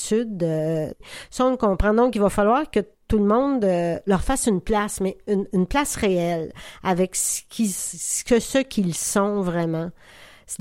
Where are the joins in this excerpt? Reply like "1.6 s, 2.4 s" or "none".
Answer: 5.5 s